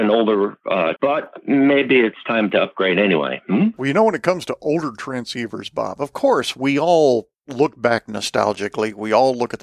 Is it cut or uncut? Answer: cut